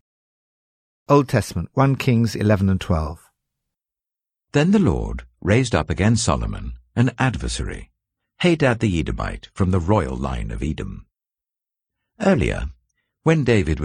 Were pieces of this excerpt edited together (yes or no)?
no